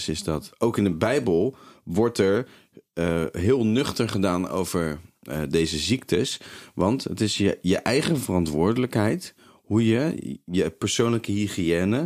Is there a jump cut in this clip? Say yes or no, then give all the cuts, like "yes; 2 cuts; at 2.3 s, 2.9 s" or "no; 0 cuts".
no; 0 cuts